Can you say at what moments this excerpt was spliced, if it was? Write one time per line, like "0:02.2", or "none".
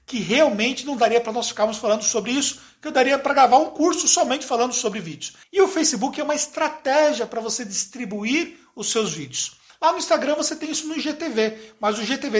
0:05.4
0:09.7